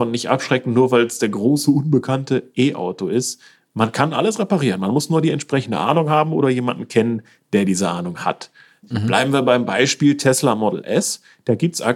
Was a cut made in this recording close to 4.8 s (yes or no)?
no